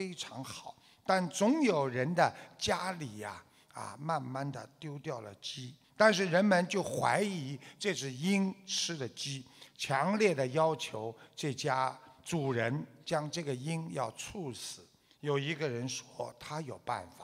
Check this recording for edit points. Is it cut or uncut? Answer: cut